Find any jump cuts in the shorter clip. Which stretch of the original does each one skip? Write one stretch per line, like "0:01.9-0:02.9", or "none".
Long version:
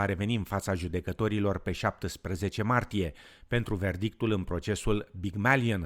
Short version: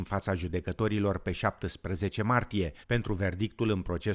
0:03.2-0:03.4